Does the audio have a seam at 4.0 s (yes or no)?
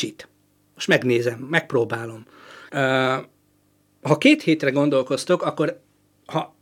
no